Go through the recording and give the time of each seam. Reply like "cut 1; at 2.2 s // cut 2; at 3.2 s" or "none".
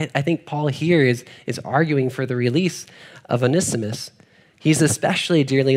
cut 1; at 4.4 s